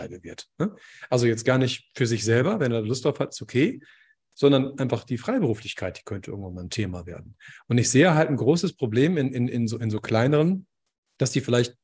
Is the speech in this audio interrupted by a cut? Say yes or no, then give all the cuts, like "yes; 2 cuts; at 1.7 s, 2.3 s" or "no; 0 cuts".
no; 0 cuts